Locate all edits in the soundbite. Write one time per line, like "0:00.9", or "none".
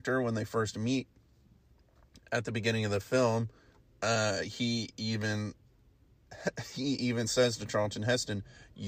none

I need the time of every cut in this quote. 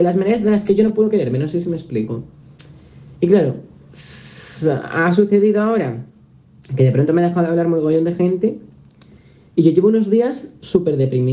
none

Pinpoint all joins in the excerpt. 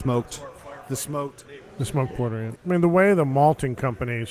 0:02.6

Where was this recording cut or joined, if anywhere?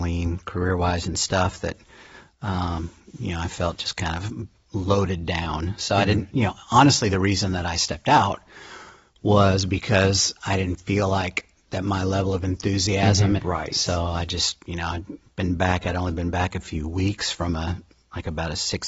0:13.4

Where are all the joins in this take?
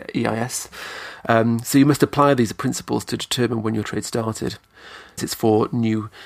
0:05.2

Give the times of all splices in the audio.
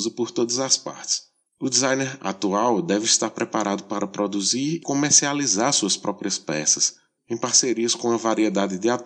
0:01.5
0:04.8
0:07.2

